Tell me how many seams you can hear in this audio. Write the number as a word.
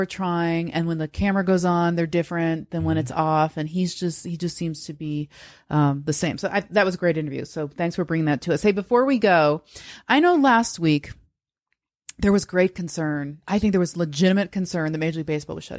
zero